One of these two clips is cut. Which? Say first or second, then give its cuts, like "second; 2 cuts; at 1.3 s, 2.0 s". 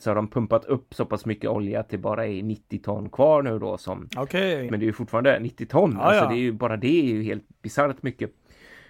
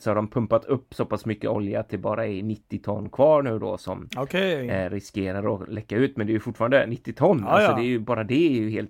first; 1 cut; at 4.7 s